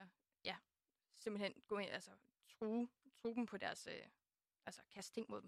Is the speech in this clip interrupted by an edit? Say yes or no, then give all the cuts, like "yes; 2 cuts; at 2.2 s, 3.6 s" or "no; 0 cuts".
no; 0 cuts